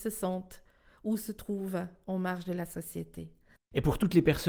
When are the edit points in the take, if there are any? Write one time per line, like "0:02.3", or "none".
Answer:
0:03.6